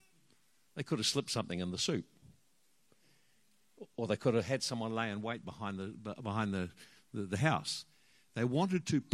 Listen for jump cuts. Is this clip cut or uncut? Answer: uncut